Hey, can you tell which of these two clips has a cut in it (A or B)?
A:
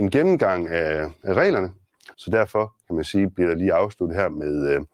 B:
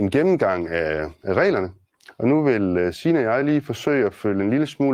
A